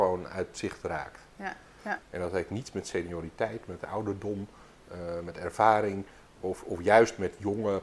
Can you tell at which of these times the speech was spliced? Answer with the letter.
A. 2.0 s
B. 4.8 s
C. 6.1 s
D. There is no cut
A